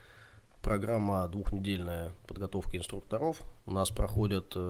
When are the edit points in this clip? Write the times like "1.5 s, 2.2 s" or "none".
3.6 s